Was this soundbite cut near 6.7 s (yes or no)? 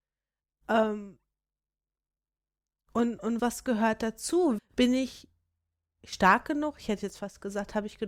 no